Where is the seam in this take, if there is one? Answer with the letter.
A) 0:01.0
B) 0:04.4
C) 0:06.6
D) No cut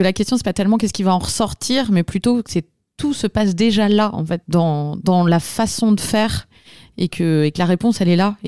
B